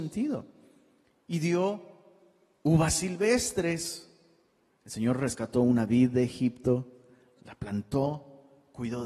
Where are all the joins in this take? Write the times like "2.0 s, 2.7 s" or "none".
4.7 s, 7.4 s